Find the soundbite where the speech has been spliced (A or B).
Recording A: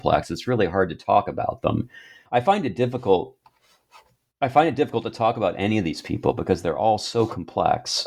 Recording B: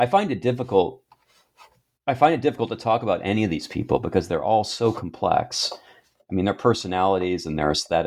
A